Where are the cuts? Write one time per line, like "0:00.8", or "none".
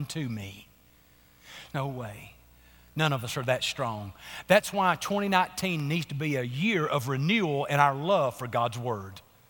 0:01.7